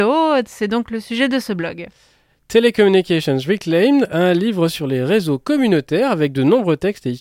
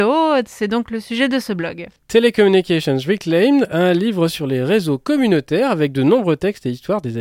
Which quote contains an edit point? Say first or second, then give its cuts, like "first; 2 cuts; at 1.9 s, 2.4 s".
second; 1 cut; at 2.0 s